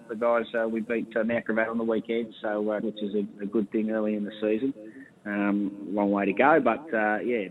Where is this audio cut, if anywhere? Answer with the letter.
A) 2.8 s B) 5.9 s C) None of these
A